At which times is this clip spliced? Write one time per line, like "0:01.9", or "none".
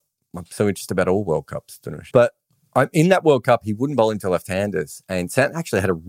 0:02.1